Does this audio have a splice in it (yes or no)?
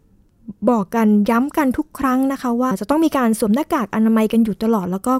yes